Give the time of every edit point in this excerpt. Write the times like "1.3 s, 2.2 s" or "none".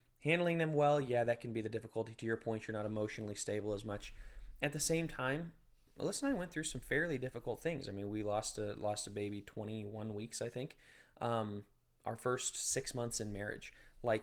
none